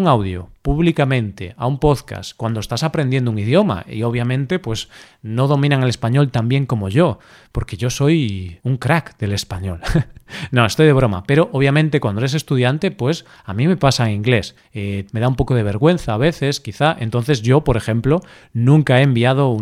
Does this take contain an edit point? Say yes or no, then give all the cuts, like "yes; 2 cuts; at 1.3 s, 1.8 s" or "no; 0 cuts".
yes; 1 cut; at 15.1 s